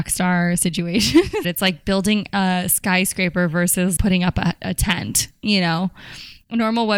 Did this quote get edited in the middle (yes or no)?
yes